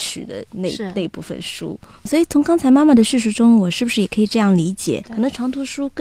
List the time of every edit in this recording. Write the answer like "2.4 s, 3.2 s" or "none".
2.1 s, 5.0 s